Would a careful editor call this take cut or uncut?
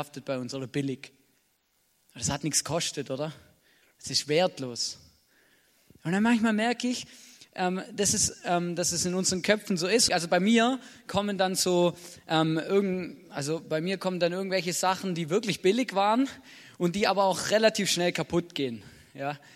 cut